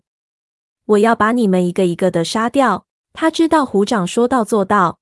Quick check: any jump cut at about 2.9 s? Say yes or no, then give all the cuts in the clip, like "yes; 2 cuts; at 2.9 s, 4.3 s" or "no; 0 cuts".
yes; 1 cut; at 2.9 s